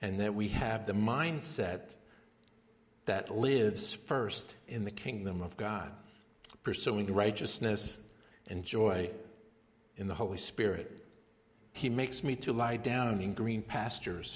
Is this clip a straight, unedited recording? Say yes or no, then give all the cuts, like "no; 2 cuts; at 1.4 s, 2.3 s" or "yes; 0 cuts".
no; 2 cuts; at 8.3 s, 11.7 s